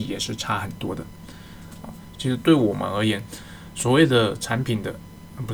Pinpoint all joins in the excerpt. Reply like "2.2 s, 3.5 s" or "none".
2.1 s